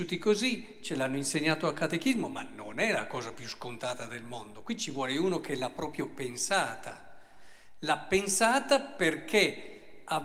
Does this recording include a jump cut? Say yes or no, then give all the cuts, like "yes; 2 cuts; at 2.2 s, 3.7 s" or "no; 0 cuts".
no; 0 cuts